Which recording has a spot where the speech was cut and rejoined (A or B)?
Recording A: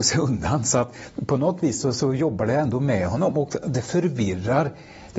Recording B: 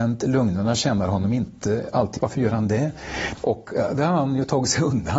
B